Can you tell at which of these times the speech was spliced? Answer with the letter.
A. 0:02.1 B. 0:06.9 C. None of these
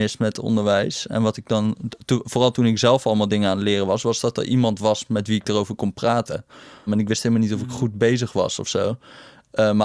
B